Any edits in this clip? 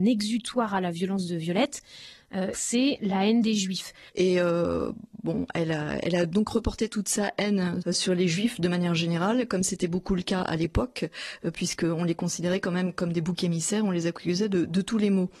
yes; 3 cuts; at 2.5 s, 4.1 s, 7.8 s

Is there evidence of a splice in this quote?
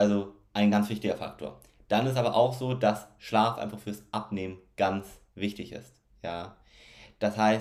no; 0 cuts

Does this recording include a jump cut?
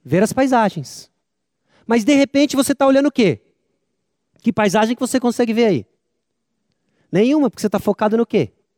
no; 0 cuts

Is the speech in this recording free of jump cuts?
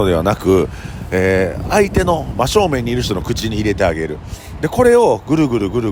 yes; 0 cuts

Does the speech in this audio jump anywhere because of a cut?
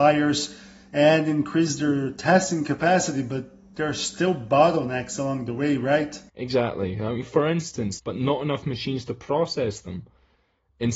yes; 2 cuts; at 6.3 s, 8.0 s

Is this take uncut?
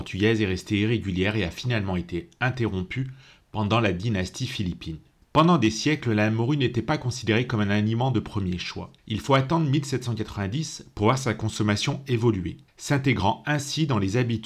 no; 3 cuts; at 5.2 s, 9.0 s, 12.7 s

